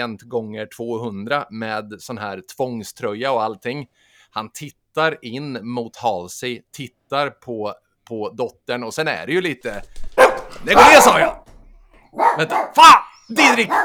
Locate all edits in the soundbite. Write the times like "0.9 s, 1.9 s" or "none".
none